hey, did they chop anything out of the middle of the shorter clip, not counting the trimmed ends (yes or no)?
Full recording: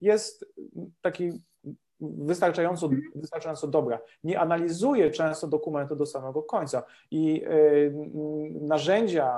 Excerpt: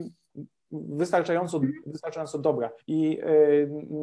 yes